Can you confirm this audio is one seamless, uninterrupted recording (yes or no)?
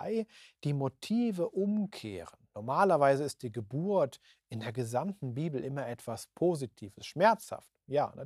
yes